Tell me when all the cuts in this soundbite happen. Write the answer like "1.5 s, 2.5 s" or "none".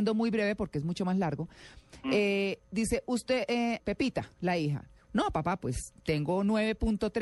3.8 s, 5.0 s